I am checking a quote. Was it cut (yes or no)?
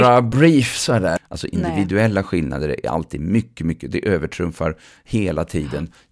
yes